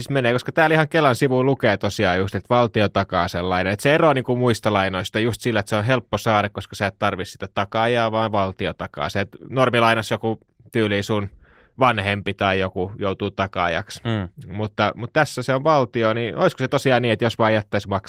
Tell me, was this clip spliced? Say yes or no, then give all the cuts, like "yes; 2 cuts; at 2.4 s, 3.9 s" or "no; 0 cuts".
no; 0 cuts